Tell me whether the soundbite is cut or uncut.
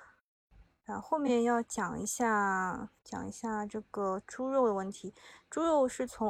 cut